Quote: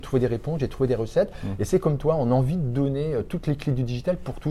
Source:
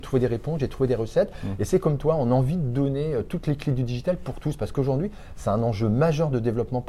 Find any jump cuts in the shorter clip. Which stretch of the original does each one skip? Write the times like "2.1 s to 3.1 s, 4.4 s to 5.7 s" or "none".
none